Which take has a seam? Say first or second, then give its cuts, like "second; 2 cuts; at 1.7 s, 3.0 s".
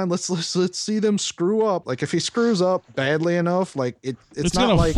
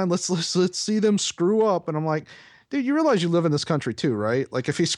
first; 1 cut; at 1.8 s